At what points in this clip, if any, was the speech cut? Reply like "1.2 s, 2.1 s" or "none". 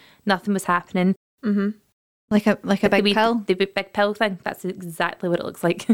1.4 s